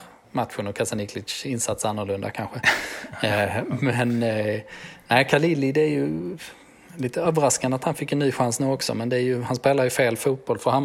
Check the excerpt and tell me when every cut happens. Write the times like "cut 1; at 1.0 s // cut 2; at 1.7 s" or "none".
none